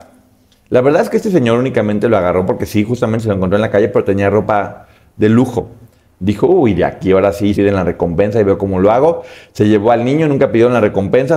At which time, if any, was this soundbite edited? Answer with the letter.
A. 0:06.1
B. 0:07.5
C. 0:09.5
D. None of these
B